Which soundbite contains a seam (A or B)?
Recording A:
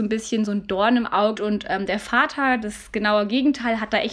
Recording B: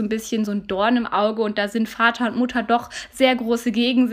A